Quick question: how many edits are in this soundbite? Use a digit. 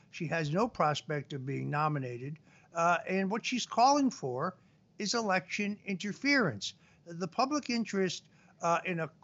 0